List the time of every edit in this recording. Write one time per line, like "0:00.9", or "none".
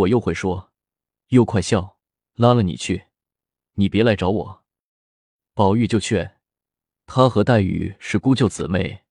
0:02.2